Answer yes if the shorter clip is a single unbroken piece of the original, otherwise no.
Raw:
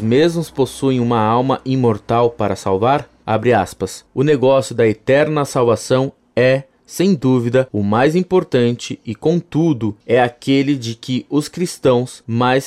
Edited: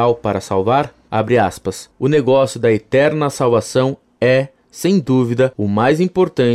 yes